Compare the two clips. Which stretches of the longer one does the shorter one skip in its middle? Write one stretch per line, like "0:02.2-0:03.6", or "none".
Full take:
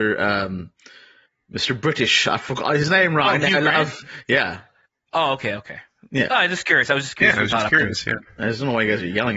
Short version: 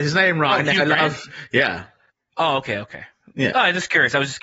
none